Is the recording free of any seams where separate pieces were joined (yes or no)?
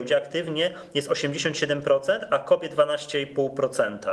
yes